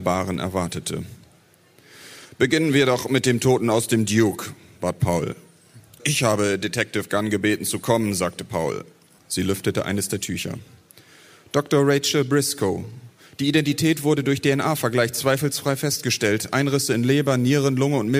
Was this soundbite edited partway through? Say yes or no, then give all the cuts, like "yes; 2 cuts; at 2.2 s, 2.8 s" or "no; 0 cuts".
yes; 2 cuts; at 6.0 s, 9.2 s